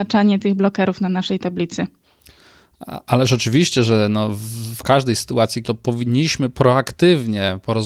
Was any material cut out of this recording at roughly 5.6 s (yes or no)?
yes